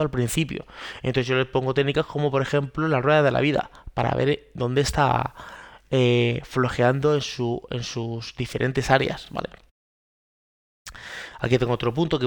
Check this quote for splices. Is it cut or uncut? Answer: uncut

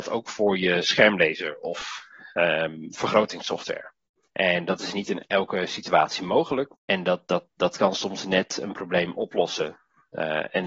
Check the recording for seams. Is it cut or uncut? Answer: cut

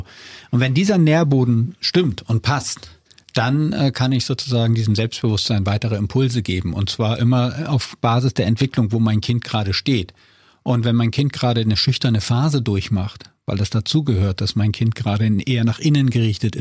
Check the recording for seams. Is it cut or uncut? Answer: uncut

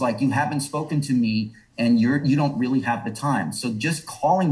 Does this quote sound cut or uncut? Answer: uncut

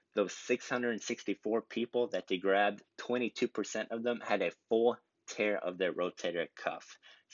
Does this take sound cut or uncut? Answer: cut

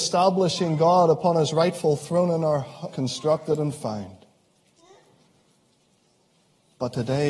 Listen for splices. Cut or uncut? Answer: cut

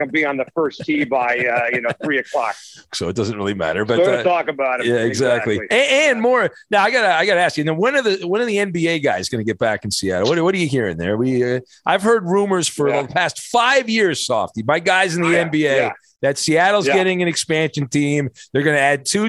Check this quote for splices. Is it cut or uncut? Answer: cut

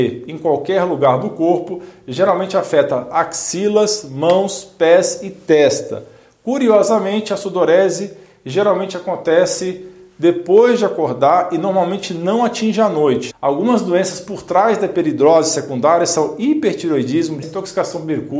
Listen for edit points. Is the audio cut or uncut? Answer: cut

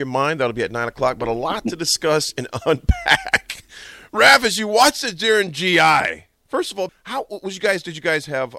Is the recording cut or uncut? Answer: cut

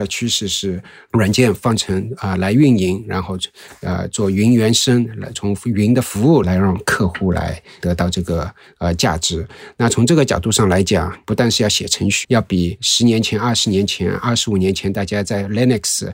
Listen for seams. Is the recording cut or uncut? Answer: cut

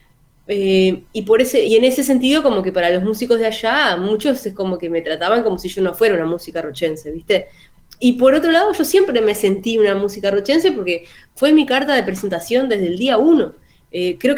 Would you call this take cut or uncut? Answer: cut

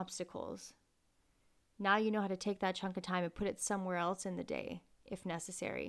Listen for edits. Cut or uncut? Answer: uncut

